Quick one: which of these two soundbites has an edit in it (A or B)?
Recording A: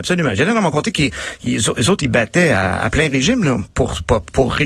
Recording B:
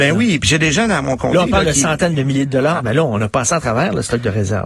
B